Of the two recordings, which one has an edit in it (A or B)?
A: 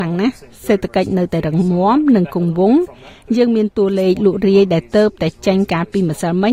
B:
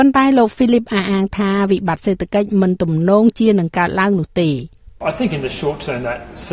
B